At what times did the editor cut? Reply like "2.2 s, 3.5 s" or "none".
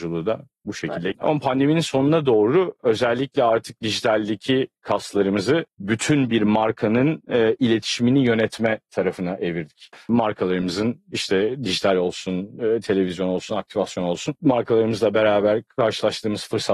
1.1 s, 9.9 s, 13.5 s